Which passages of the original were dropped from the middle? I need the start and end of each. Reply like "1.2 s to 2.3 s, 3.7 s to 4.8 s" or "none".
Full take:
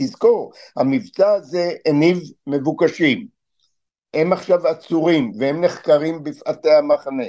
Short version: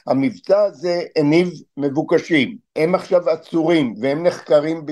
3.4 s to 4.1 s